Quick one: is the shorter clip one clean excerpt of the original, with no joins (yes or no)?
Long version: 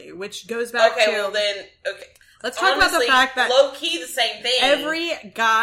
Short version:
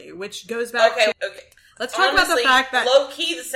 no